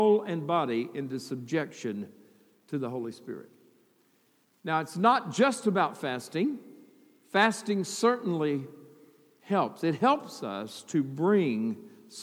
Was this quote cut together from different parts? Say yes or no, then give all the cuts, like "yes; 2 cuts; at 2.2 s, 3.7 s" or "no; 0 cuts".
no; 0 cuts